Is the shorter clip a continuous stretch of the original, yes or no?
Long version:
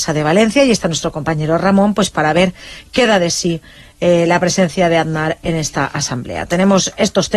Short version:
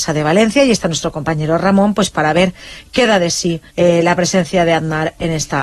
no